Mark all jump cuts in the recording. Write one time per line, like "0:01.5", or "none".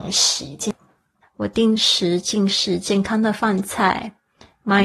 0:01.2